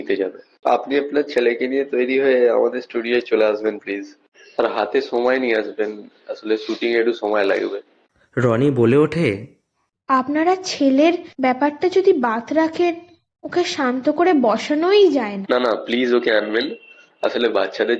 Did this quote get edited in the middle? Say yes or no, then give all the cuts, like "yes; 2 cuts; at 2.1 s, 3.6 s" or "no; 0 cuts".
yes; 1 cut; at 15.4 s